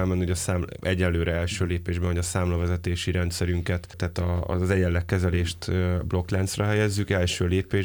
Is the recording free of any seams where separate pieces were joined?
yes; 0 cuts

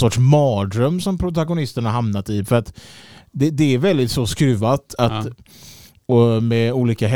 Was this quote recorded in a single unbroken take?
yes; 0 cuts

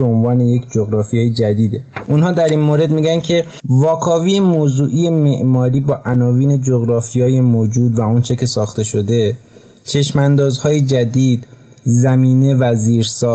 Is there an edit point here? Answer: no; 0 cuts

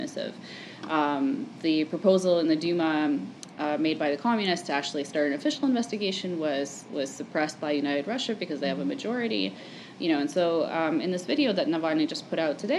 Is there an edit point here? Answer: no; 0 cuts

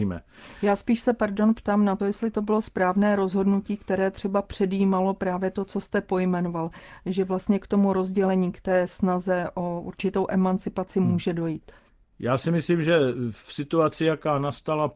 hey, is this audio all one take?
yes; 0 cuts

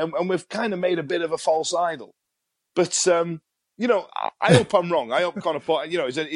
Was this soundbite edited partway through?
no; 0 cuts

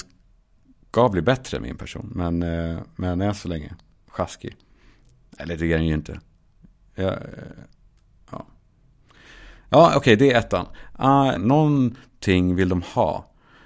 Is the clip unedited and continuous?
no; 1 cut; at 11.3 s

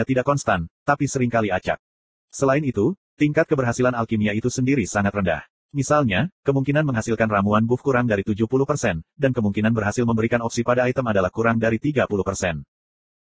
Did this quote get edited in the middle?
yes; 1 cut; at 6.3 s

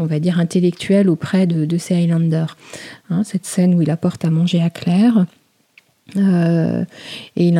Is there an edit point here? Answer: yes; 1 cut; at 3.0 s

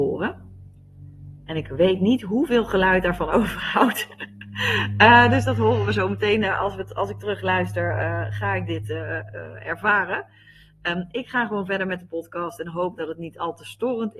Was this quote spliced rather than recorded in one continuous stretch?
no; 0 cuts

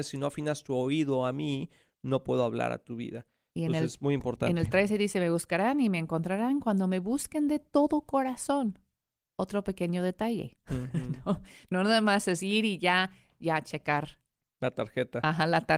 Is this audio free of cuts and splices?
yes; 0 cuts

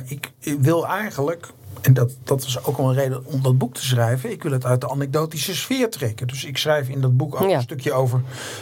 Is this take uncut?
yes; 0 cuts

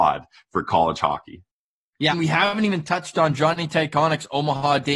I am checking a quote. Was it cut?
yes; 1 cut; at 2.1 s

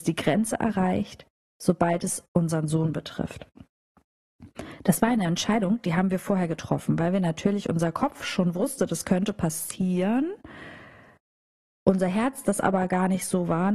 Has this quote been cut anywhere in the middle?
no; 0 cuts

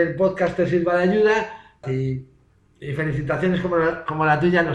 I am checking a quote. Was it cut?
yes; 1 cut; at 1.8 s

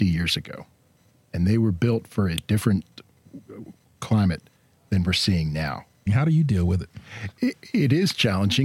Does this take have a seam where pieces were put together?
yes; 2 cuts; at 6.1 s, 7.3 s

